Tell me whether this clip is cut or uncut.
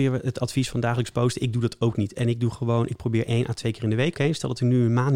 cut